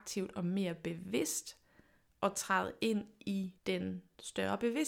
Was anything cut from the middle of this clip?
yes; 1 cut; at 3.6 s

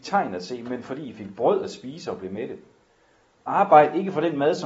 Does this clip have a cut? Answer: no; 0 cuts

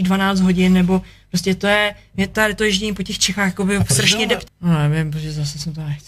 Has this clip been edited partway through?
yes; 1 cut; at 4.5 s

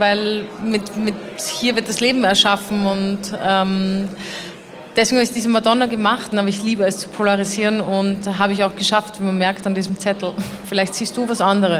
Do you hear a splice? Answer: yes; 2 cuts; at 6.3 s, 10.6 s

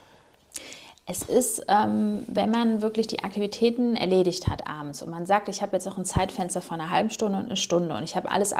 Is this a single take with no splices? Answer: yes; 0 cuts

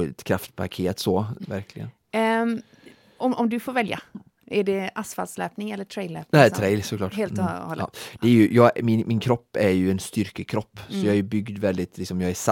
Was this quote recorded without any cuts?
no; 1 cut; at 1.4 s

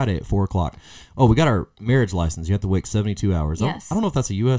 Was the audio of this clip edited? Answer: no; 0 cuts

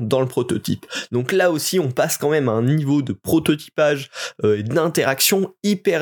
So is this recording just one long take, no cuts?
yes; 0 cuts

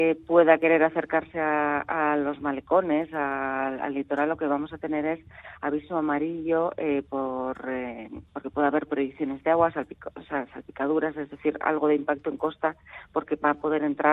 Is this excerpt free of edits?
yes; 0 cuts

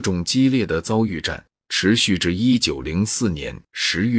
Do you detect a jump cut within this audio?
no; 0 cuts

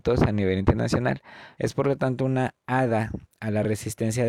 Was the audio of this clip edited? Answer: yes; 1 cut; at 1.5 s

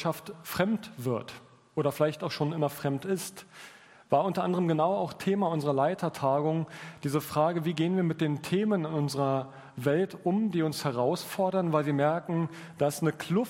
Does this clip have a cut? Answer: no; 0 cuts

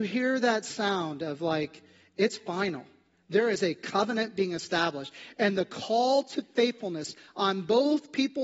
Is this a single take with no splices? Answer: yes; 0 cuts

